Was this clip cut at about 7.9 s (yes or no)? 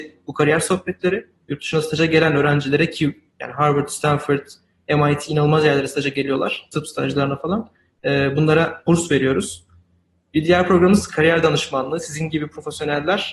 no